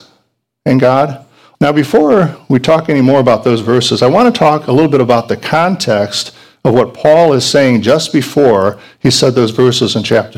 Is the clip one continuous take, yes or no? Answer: no